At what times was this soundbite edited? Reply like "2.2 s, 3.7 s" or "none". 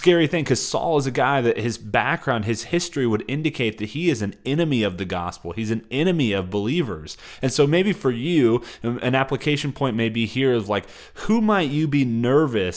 none